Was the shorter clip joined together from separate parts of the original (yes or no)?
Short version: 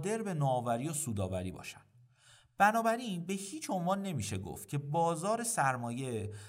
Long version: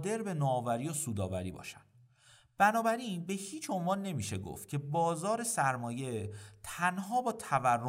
no